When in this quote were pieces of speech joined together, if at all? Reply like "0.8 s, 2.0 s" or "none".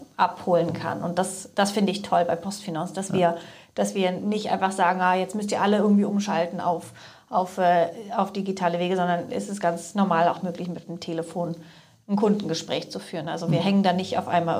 none